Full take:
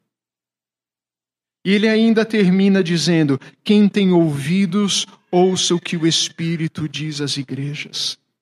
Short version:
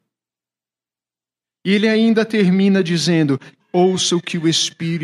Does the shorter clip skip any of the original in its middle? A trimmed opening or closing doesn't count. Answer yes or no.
yes